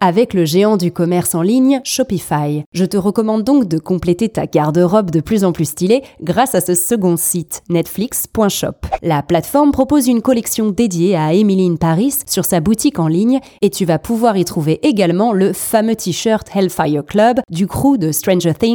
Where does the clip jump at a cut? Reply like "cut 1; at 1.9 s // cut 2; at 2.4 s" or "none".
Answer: none